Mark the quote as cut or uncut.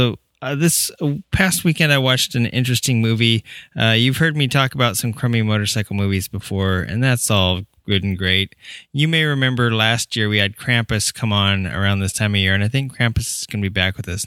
uncut